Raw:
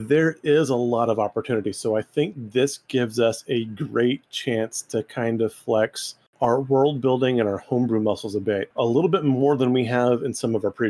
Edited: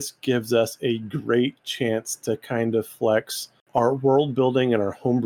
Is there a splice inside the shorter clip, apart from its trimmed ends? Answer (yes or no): no